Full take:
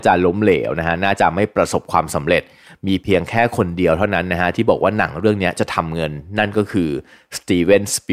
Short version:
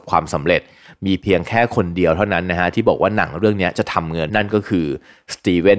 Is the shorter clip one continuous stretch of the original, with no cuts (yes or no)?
no